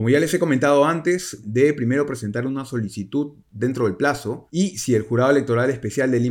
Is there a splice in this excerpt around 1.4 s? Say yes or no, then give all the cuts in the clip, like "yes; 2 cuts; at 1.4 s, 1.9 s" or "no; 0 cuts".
yes; 1 cut; at 1.4 s